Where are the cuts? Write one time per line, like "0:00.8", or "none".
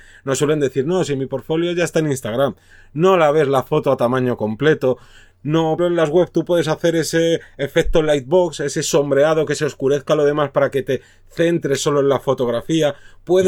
0:05.8